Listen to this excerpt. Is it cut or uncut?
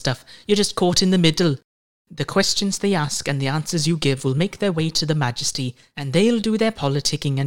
uncut